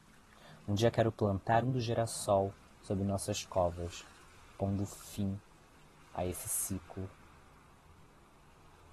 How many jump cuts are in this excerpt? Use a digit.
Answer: 1